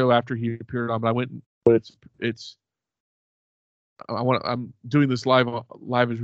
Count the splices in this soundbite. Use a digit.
1